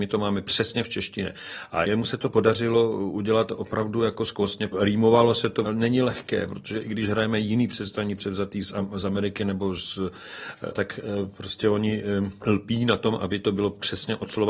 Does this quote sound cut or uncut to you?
cut